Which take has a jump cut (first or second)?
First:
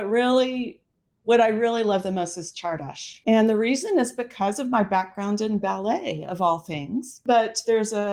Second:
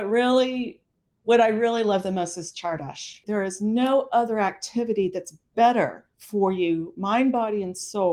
second